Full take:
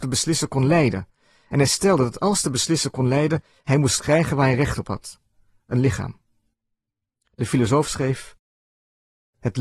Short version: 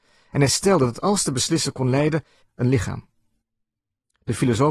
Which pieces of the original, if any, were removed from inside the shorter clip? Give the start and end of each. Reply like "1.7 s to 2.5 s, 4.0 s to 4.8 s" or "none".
3.6 s to 5.5 s